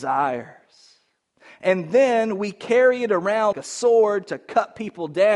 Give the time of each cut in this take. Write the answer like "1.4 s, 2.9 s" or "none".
3.5 s